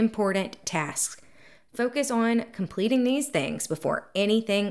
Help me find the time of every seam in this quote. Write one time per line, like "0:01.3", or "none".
none

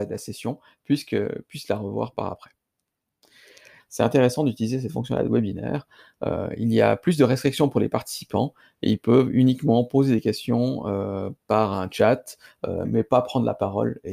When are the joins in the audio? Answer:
0:03.8
0:12.8

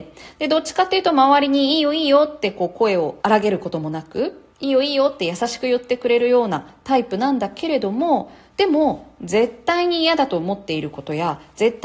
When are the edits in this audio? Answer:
0:03.2
0:04.5

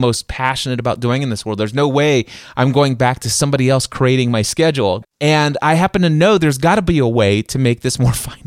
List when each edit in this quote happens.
0:05.0

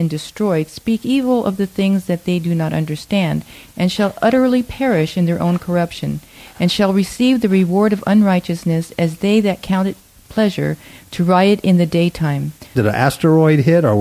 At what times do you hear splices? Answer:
0:12.8

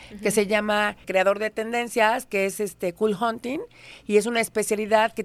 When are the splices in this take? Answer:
0:01.0

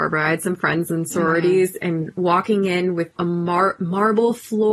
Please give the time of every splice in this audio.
0:03.2

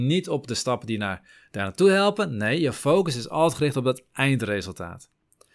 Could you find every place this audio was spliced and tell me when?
none

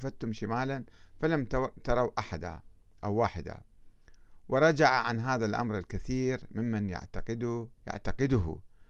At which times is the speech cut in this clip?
0:07.8

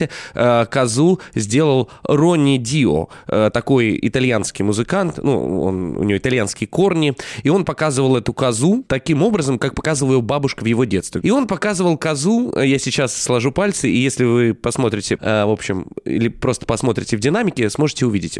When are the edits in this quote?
0:09.6
0:11.2
0:15.2

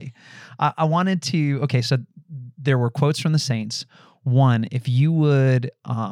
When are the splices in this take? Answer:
none

